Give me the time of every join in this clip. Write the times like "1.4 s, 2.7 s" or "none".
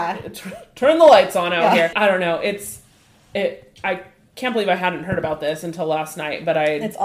1.9 s